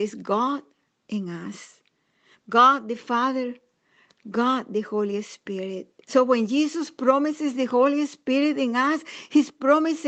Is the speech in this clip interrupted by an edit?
yes; 3 cuts; at 2.3 s, 4.1 s, 6.0 s

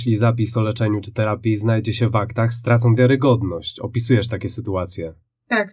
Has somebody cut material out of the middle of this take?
no; 0 cuts

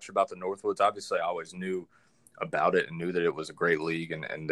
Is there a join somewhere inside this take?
no; 0 cuts

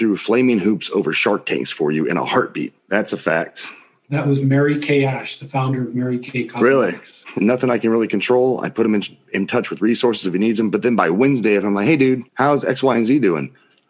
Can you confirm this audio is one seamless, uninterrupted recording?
no; 3 cuts; at 2.8 s, 7.4 s, 12.3 s

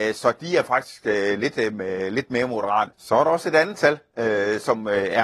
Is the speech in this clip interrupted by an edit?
yes; 1 cut; at 2.9 s

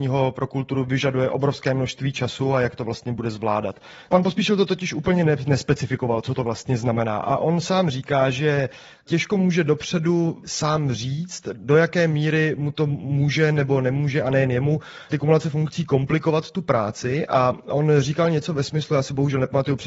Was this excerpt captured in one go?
no; 1 cut; at 4.1 s

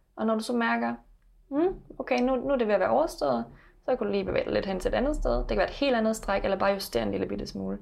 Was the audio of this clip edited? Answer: no; 0 cuts

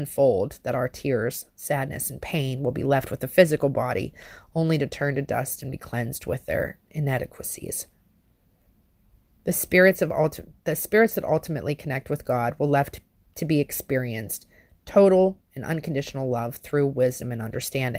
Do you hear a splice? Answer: no; 0 cuts

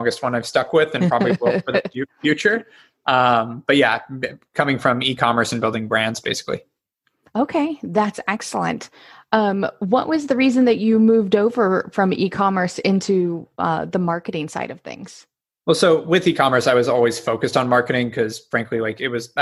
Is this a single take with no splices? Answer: yes; 0 cuts

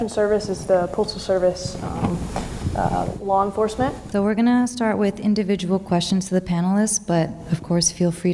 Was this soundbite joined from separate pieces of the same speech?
yes; 1 cut; at 4.1 s

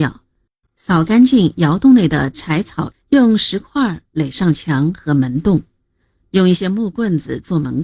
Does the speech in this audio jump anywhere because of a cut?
yes; 1 cut; at 2.9 s

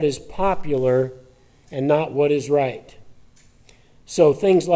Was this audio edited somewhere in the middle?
no; 0 cuts

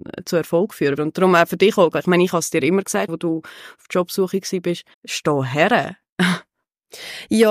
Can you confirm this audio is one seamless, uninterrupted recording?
no; 3 cuts; at 1.0 s, 3.1 s, 4.9 s

